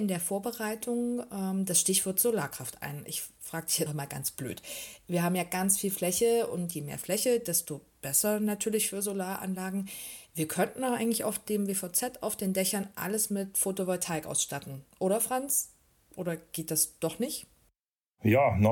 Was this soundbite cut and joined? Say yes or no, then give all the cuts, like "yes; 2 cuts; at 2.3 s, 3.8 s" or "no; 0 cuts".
yes; 1 cut; at 3.9 s